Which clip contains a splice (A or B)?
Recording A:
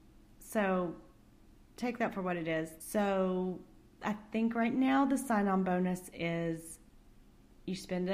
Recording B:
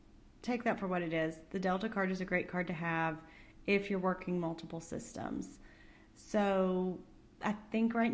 A